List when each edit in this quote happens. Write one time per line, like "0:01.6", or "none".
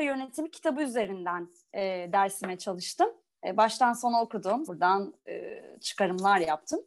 0:04.7